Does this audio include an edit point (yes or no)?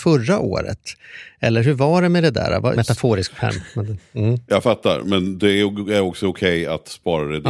yes